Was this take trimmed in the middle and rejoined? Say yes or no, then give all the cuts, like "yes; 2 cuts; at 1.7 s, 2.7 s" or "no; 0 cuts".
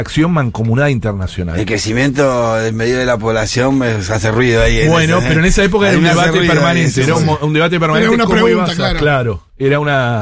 no; 0 cuts